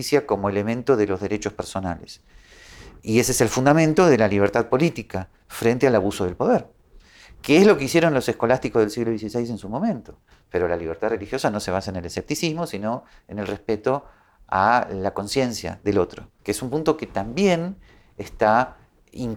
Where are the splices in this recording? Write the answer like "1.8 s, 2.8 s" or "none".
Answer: 10.4 s, 16.4 s